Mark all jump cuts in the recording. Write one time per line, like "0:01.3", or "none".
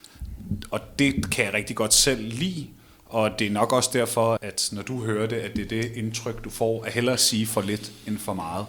0:04.4